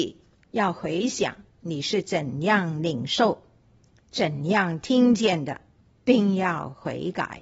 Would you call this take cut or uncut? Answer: cut